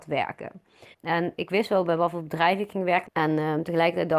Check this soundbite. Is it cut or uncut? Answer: cut